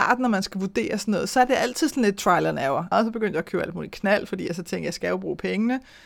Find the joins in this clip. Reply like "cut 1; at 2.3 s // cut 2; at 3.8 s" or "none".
cut 1; at 2.9 s